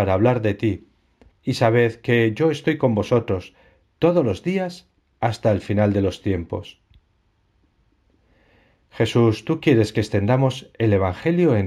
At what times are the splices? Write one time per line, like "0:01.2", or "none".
0:01.3